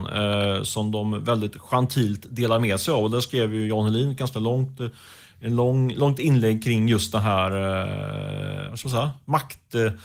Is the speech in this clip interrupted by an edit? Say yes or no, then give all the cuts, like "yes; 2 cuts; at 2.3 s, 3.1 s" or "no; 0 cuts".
no; 0 cuts